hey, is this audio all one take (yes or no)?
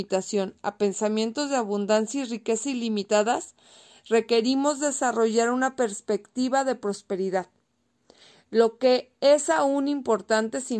yes